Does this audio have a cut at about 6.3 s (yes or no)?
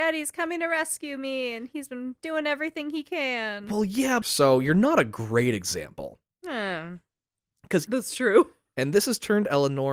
no